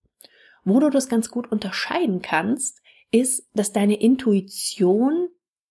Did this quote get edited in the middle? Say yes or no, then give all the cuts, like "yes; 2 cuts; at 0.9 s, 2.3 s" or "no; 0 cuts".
no; 0 cuts